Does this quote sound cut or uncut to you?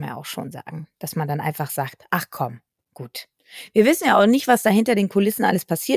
uncut